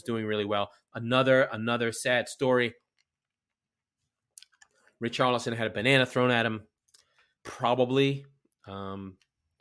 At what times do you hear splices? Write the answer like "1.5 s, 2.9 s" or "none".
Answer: 7.4 s